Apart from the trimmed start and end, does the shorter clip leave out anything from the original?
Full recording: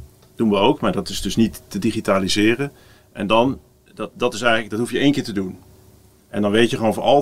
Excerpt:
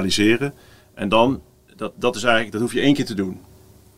no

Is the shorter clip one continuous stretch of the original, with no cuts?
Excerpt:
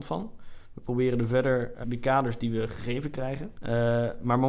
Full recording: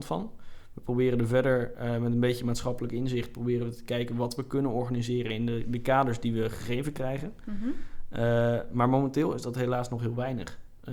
no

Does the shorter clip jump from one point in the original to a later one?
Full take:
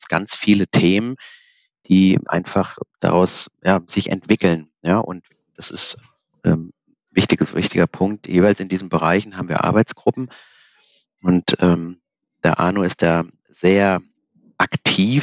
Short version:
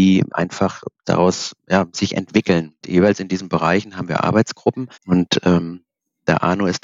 yes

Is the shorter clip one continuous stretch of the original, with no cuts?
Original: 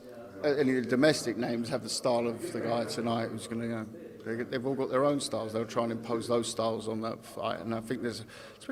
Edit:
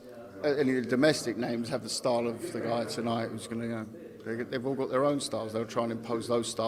yes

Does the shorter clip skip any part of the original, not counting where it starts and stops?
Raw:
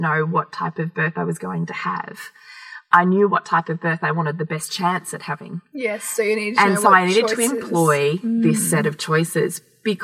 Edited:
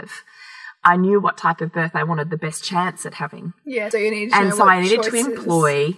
yes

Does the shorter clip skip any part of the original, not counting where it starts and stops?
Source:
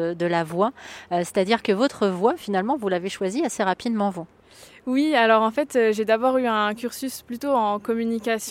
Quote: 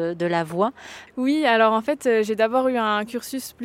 yes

